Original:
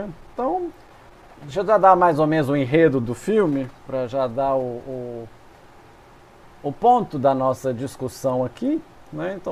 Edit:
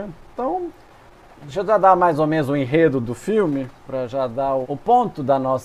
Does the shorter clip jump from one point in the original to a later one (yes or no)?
yes